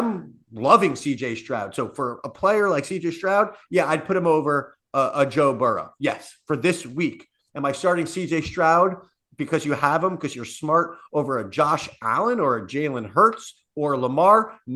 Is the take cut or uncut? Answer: uncut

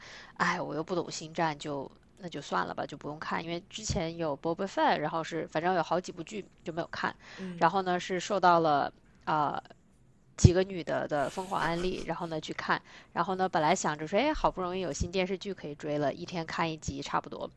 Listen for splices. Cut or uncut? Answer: uncut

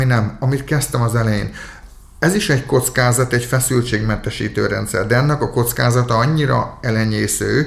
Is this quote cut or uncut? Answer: uncut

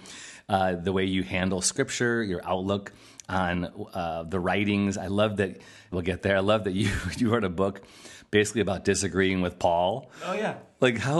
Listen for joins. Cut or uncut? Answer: cut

